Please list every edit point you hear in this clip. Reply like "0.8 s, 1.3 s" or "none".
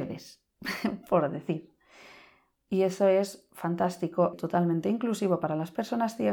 4.3 s

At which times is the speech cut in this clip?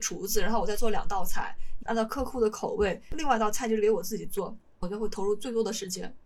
1.8 s, 3.1 s

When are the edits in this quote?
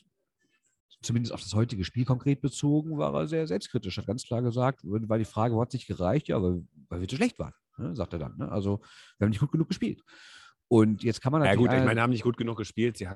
none

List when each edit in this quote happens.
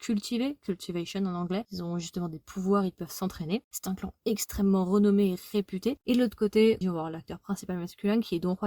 3.6 s, 6.8 s

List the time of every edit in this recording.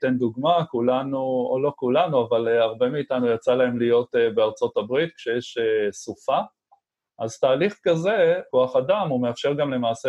7.1 s, 8.5 s

